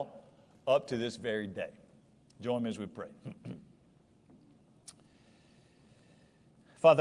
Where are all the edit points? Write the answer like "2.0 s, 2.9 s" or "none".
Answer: none